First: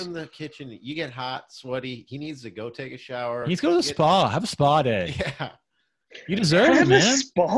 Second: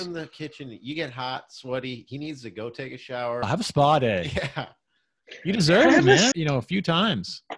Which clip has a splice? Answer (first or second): second